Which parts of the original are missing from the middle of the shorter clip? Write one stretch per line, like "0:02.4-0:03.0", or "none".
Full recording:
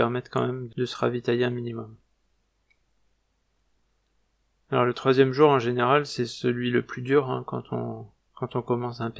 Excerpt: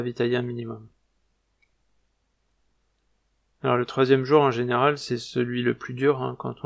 none